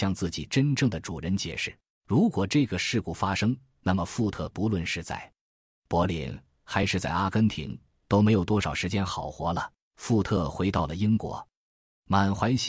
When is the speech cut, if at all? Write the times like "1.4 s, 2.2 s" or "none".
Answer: 1.9 s, 9.9 s